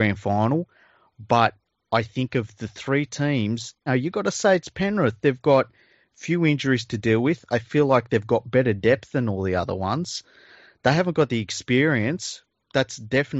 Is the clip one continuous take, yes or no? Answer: no